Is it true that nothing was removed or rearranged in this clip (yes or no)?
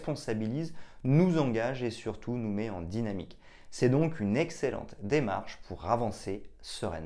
yes